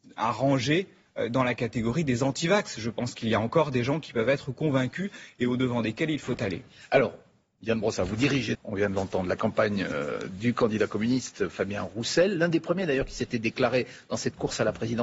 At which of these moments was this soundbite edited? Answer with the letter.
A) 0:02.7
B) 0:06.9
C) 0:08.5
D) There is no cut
C